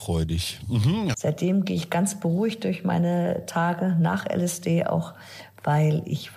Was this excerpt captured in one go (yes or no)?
no